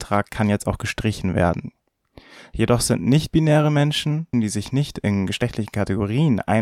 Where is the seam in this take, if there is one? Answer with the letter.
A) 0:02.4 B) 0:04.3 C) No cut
B